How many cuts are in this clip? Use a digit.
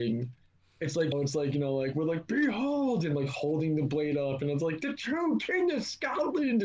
1